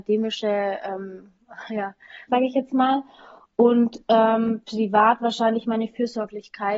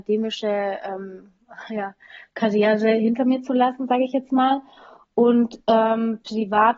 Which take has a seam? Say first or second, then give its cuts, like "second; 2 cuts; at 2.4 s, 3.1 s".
first; 1 cut; at 2.3 s